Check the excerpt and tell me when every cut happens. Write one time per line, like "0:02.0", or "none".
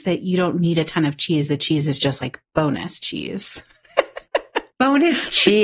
0:02.5